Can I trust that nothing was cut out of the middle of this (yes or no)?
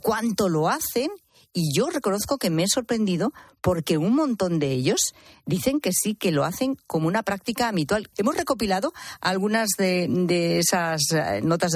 no